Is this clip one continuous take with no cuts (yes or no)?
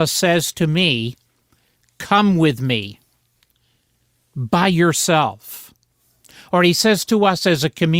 yes